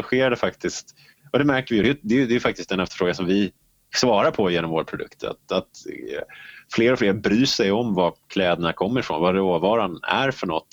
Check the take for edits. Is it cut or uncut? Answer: uncut